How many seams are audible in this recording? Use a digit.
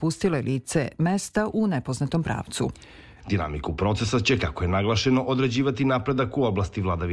1